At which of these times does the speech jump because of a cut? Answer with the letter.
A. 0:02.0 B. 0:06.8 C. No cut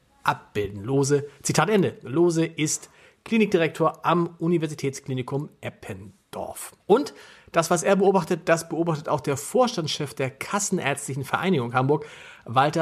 B